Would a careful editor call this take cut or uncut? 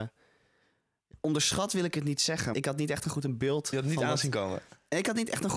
cut